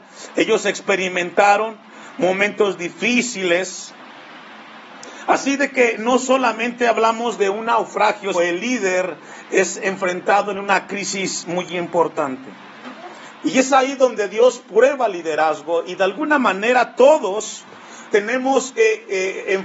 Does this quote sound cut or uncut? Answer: cut